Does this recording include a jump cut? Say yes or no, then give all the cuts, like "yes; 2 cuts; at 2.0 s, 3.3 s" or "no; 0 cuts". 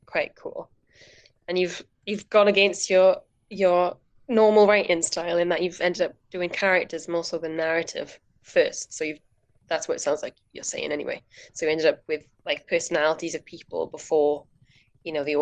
yes; 1 cut; at 12.3 s